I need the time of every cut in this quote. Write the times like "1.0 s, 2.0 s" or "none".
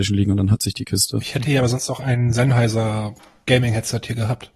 none